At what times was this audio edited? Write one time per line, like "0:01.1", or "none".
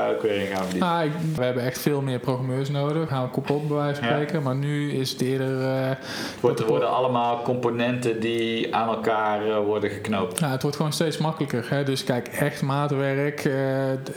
0:01.4
0:03.1